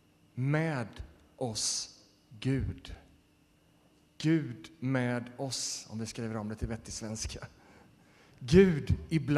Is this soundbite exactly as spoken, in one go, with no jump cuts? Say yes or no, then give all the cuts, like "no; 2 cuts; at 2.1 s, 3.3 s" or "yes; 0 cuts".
yes; 0 cuts